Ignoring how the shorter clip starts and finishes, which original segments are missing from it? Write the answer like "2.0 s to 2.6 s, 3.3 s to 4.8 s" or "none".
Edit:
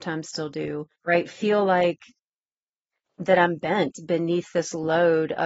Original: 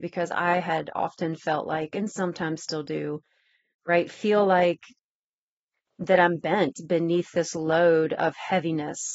3.3 s to 3.8 s